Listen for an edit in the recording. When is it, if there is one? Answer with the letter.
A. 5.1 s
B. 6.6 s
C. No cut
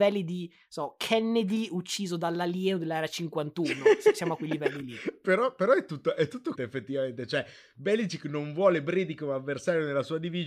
B